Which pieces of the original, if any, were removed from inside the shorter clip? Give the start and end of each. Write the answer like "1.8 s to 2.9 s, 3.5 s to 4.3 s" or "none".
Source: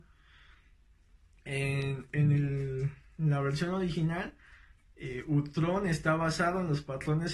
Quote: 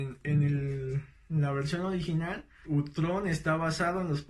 4.5 s to 5.2 s